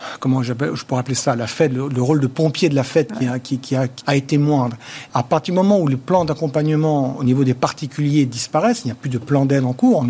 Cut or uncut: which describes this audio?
cut